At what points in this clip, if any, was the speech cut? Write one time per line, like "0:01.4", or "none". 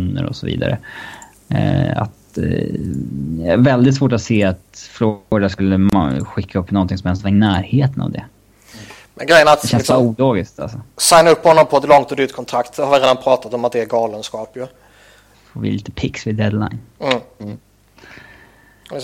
0:15.3